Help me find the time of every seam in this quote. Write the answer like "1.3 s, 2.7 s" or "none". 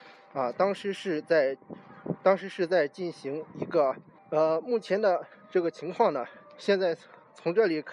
4.2 s